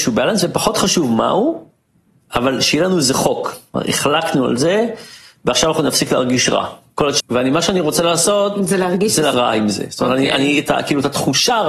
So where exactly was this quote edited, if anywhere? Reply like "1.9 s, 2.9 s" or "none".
7.2 s, 9.3 s